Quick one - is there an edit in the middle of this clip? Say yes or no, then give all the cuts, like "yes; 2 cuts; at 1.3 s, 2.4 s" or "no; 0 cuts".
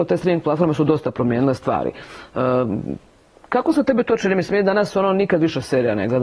no; 0 cuts